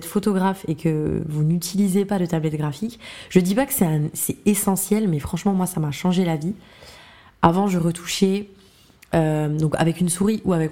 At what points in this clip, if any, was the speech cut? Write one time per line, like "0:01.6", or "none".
none